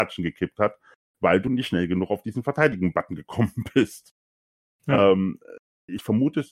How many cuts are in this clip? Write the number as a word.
zero